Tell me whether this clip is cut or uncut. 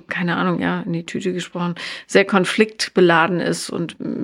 uncut